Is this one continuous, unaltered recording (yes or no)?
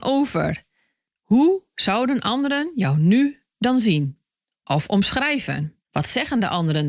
no